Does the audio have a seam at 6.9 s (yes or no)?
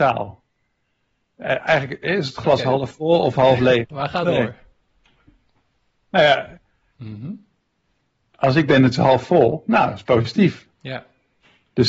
yes